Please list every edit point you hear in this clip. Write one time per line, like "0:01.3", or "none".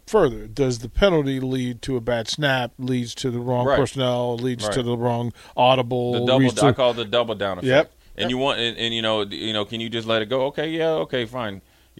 none